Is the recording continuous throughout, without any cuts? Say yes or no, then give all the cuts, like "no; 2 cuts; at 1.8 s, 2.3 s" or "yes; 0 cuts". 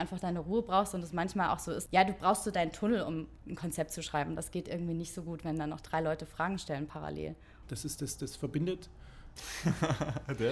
no; 3 cuts; at 1.9 s, 7.6 s, 9.4 s